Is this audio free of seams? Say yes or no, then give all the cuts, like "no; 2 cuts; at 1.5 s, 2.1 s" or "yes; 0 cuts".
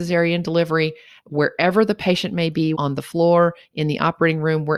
no; 1 cut; at 2.7 s